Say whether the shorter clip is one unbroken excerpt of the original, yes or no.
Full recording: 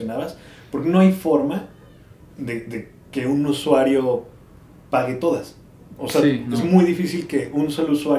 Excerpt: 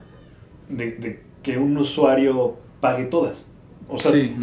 no